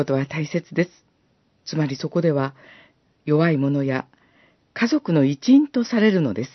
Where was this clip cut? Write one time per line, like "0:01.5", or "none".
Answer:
0:01.6
0:04.6